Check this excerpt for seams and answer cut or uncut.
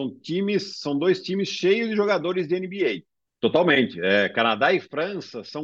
cut